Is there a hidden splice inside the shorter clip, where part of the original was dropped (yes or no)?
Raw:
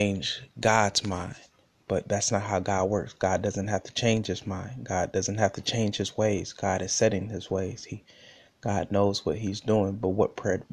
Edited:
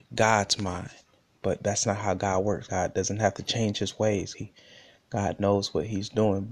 yes